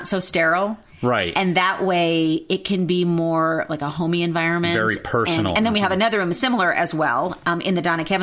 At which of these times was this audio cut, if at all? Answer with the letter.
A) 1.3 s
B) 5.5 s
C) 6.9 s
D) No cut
B